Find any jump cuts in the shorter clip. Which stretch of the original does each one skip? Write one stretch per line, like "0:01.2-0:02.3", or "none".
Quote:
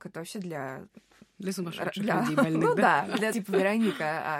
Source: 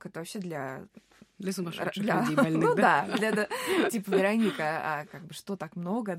0:03.3-0:03.9